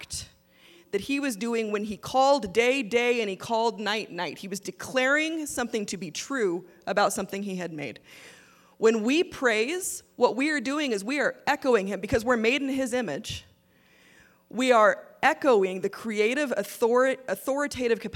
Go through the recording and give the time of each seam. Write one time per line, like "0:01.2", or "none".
none